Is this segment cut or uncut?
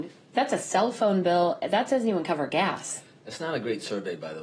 uncut